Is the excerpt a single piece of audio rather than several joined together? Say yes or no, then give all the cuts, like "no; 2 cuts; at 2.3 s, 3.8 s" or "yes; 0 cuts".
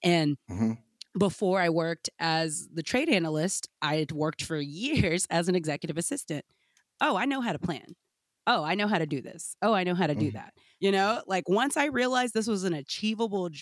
yes; 0 cuts